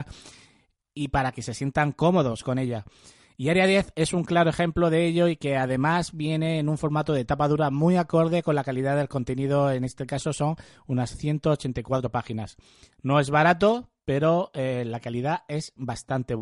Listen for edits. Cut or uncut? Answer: uncut